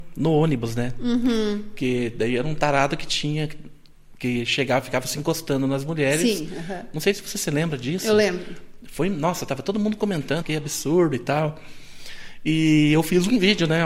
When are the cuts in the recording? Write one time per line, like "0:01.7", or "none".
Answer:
0:10.4